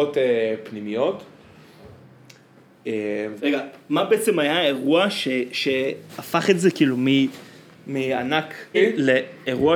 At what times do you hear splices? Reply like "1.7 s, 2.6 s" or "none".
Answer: 3.4 s, 8.7 s